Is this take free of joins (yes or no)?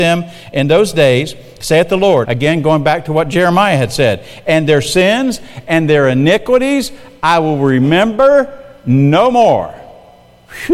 no